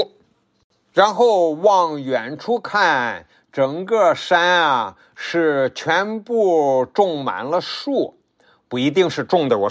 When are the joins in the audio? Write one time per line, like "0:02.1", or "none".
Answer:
none